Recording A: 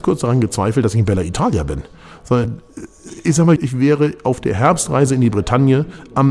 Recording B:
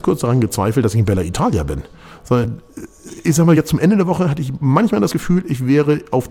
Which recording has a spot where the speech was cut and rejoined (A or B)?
A